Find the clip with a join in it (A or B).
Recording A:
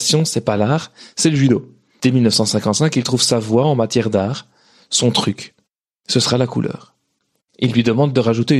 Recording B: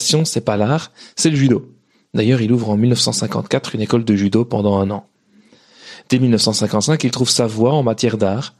A